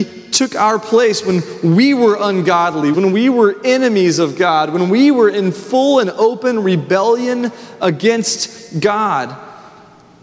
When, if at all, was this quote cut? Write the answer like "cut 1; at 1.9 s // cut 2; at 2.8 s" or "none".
cut 1; at 2.9 s